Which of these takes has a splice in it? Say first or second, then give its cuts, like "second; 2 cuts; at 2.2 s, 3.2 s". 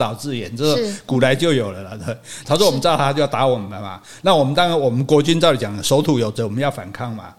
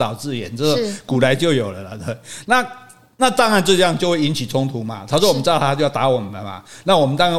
first; 1 cut; at 2.4 s